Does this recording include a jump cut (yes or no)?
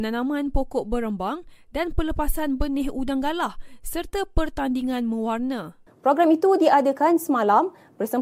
yes